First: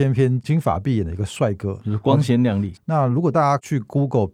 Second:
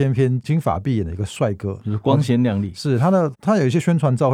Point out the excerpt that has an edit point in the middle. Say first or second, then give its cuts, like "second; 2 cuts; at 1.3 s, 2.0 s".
first; 1 cut; at 2.7 s